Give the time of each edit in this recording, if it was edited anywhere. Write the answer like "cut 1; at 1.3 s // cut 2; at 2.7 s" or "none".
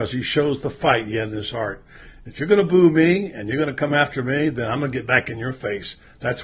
none